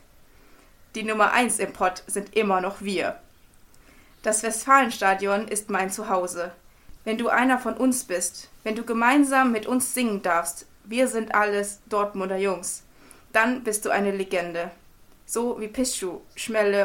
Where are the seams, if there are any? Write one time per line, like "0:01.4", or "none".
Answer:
0:07.0